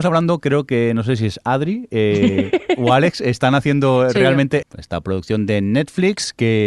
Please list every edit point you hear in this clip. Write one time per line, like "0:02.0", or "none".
0:04.6